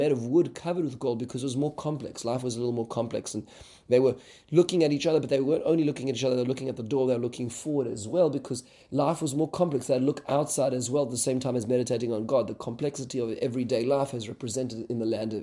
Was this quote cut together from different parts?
no; 0 cuts

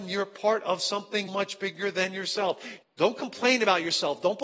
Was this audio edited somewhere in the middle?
yes; 2 cuts; at 1.3 s, 2.8 s

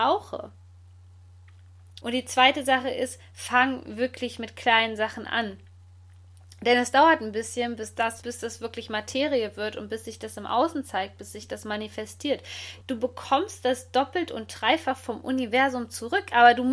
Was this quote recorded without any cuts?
no; 3 cuts; at 2.0 s, 8.2 s, 12.8 s

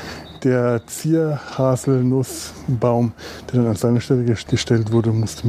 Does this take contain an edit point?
yes; 1 cut; at 4.5 s

